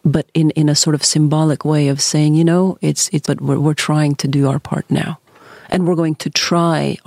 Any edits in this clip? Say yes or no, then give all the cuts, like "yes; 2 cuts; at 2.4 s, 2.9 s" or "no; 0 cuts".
yes; 1 cut; at 3.2 s